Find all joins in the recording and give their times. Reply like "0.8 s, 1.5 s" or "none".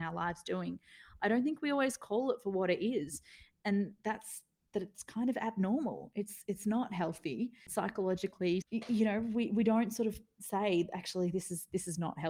8.6 s